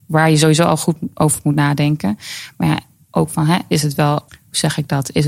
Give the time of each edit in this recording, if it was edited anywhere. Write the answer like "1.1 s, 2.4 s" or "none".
4.3 s